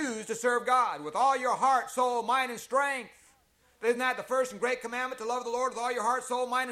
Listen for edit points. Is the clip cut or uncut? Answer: uncut